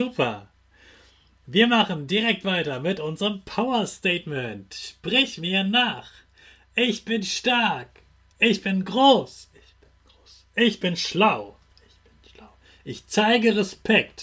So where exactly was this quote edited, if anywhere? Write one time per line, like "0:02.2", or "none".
0:08.3